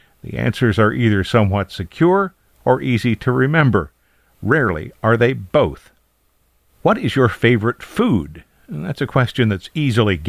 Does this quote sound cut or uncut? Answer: uncut